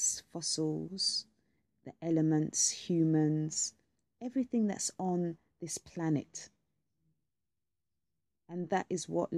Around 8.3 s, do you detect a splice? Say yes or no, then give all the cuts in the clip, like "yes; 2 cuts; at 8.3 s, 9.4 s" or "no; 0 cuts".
yes; 1 cut; at 8.3 s